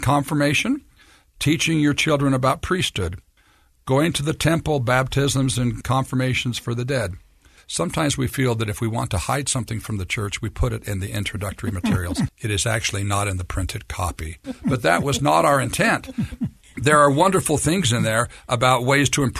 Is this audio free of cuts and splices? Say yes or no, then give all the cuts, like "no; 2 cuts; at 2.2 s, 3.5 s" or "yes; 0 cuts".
no; 3 cuts; at 7.6 s, 12.3 s, 14.4 s